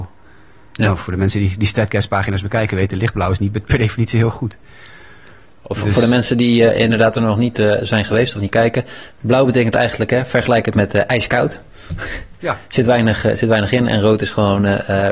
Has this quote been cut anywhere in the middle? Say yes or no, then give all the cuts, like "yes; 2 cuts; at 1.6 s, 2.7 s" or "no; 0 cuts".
no; 0 cuts